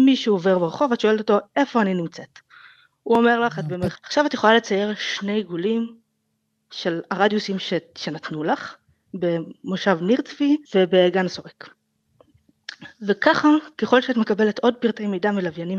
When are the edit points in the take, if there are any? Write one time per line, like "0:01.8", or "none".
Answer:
0:04.0
0:09.0
0:10.6